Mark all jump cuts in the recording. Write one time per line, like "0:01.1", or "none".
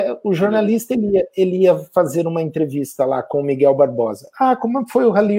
none